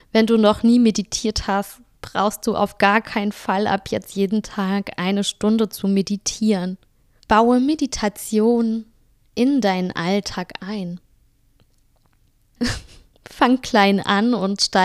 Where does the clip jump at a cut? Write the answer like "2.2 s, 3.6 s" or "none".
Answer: 7.2 s, 12.6 s